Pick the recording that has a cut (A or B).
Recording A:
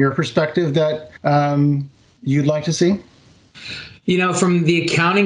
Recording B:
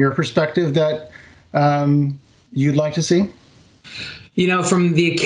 A